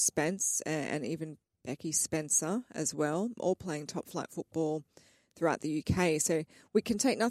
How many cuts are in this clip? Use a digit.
1